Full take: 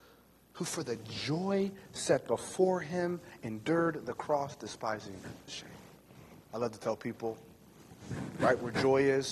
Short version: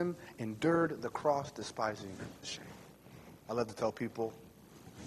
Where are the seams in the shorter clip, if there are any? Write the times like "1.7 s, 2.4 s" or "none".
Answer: none